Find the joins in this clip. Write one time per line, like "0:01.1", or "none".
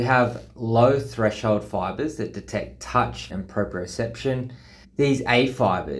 0:03.3
0:04.8